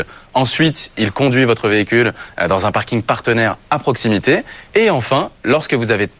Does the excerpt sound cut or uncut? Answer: uncut